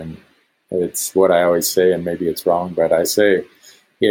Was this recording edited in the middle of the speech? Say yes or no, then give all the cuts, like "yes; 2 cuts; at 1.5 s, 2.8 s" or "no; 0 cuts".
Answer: no; 0 cuts